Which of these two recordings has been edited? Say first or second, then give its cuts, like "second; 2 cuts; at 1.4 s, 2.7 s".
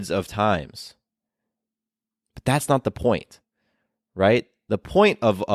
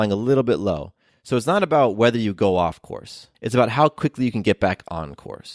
second; 2 cuts; at 1.1 s, 3.3 s